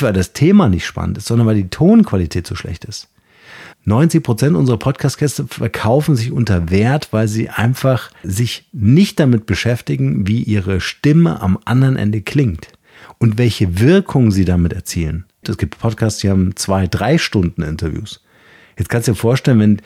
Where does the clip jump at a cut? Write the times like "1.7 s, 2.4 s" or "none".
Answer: 3.7 s, 8.2 s, 15.4 s